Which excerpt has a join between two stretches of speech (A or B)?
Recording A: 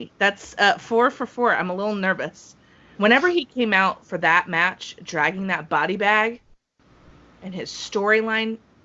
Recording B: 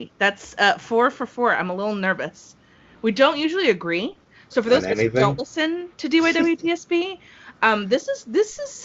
A